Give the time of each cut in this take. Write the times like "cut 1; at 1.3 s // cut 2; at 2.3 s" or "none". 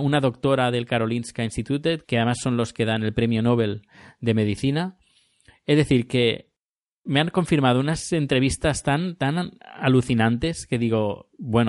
cut 1; at 2.0 s

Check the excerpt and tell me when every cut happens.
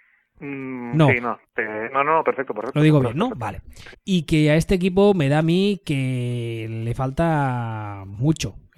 cut 1; at 3.9 s

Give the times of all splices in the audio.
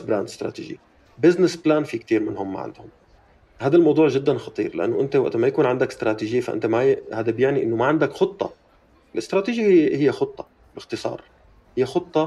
none

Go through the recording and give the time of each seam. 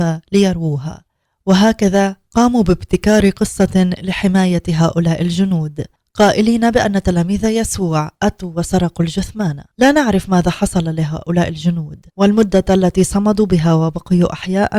cut 1; at 9.7 s // cut 2; at 12.1 s

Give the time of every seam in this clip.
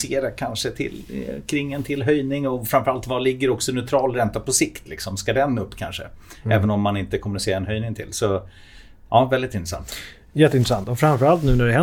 none

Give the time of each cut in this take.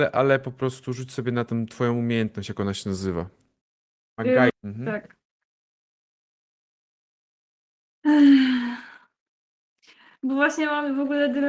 cut 1; at 4.5 s

